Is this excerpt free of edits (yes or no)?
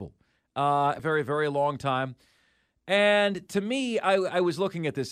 no